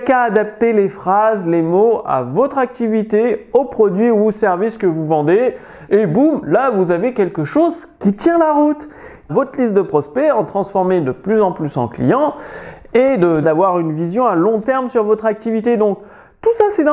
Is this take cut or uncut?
cut